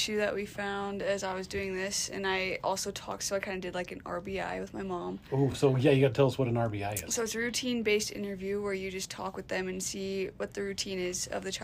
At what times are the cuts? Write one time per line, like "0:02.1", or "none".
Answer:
none